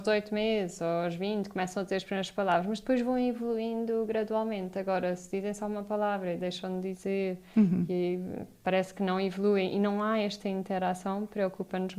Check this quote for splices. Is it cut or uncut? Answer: uncut